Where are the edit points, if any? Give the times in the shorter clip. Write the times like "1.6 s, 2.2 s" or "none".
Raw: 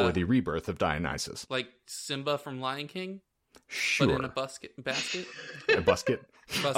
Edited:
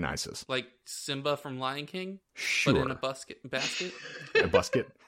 2.3 s

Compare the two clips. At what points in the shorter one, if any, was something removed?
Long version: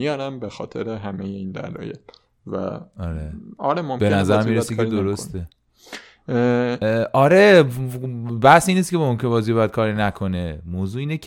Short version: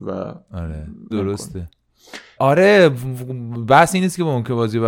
1.1 s, 2.4 s

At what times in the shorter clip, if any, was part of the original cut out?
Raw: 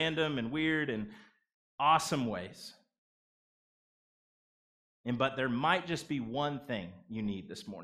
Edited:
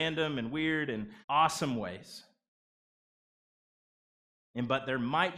1.2 s

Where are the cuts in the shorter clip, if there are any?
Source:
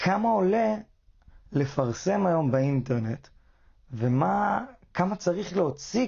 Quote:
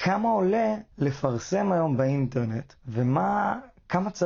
0.9 s, 2.8 s

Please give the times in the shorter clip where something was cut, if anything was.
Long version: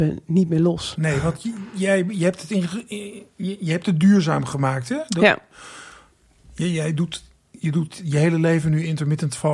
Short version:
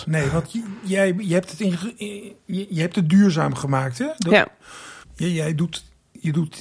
5.0 s

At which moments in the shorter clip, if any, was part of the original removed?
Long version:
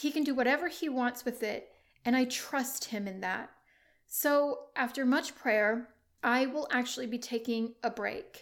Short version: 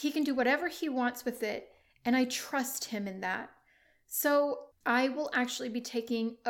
4.7 s

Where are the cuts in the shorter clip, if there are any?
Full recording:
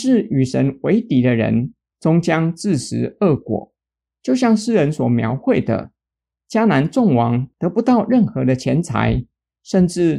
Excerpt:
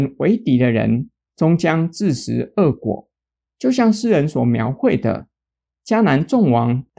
none

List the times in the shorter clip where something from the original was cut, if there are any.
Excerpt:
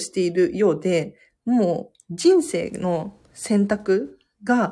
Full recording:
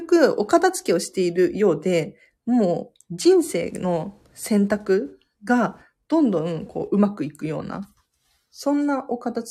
none

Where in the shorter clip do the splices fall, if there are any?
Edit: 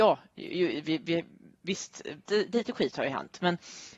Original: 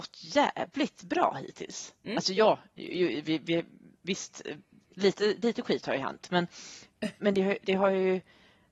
2.3 s

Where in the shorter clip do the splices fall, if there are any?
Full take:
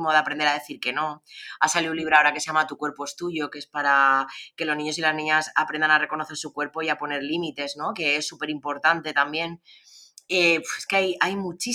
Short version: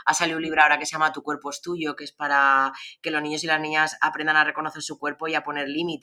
none

